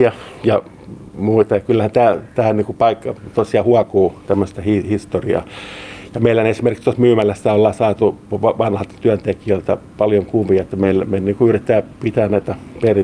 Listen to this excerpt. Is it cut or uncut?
uncut